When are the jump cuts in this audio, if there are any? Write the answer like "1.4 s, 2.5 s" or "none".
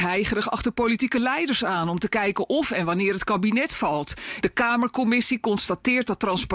4.4 s